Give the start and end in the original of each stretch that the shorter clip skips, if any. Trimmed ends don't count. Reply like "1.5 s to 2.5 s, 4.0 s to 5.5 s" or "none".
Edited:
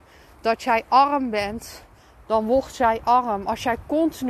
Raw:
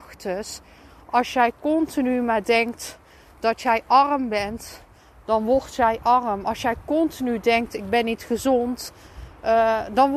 none